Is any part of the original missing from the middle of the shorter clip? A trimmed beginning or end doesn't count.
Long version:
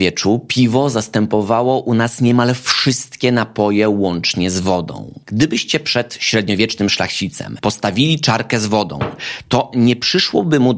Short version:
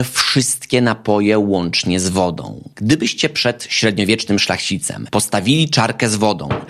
no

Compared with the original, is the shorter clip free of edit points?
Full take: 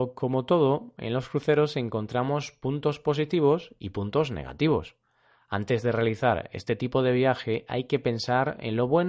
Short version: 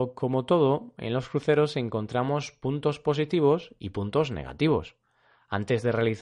yes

